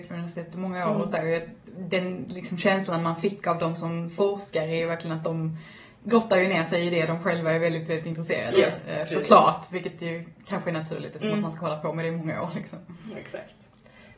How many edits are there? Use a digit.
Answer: 0